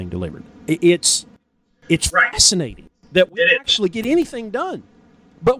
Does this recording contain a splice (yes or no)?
no